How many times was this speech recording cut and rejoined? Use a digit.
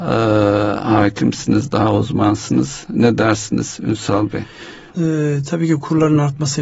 1